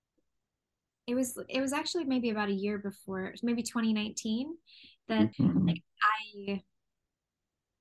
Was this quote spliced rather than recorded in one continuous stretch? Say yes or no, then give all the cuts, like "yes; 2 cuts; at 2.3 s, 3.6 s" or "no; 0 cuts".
yes; 1 cut; at 5.3 s